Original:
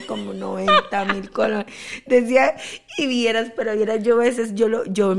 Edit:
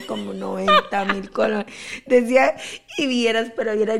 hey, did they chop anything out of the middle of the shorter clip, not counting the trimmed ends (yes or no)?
no